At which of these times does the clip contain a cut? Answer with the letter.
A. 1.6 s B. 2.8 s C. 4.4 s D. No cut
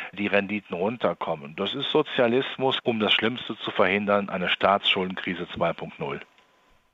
B